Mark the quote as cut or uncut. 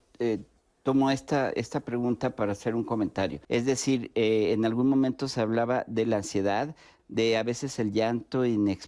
cut